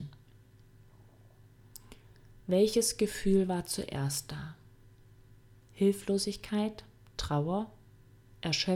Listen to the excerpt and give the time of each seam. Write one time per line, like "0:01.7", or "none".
none